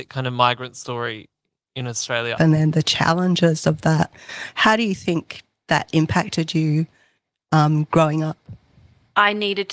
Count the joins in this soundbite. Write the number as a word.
one